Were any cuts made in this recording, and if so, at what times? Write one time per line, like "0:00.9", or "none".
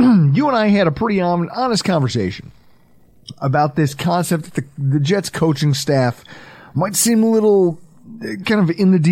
none

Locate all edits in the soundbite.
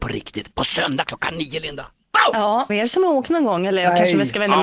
0:02.7

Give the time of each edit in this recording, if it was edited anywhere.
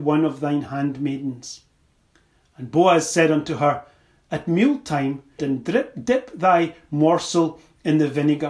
0:05.4

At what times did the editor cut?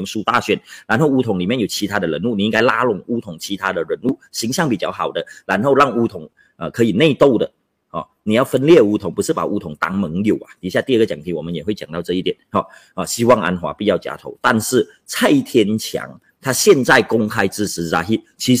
none

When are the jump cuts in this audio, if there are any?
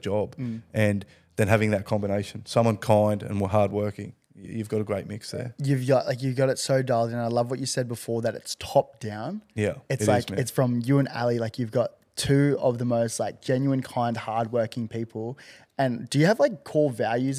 none

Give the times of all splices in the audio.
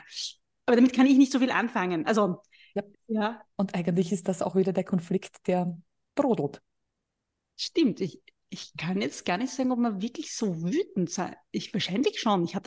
0:02.9

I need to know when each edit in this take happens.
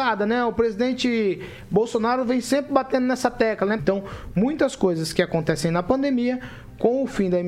0:03.8

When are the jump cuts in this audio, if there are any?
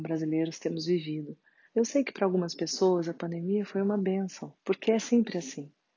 0:01.7
0:04.6

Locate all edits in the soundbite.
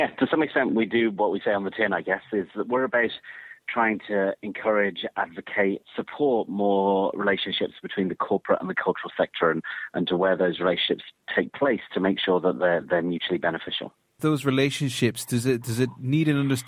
0:05.8

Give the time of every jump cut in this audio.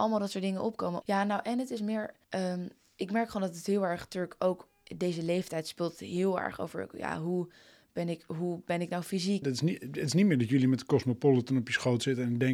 0:01.0
0:02.2
0:09.4

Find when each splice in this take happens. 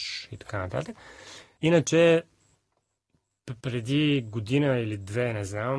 0:01.6
0:03.6

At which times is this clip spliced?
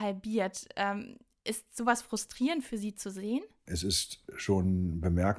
0:03.7

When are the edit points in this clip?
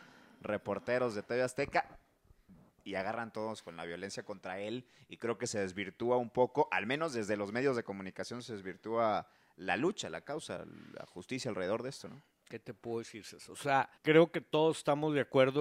0:14.0

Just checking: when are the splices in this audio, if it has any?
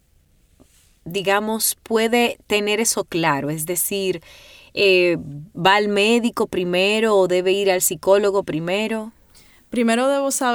none

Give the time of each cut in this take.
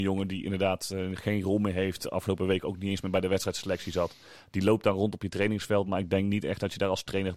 none

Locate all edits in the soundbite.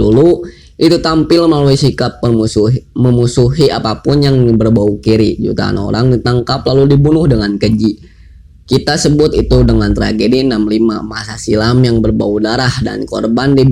none

